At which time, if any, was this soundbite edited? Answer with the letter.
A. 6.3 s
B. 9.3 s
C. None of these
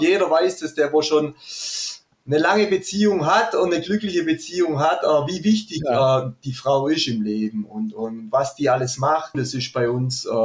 B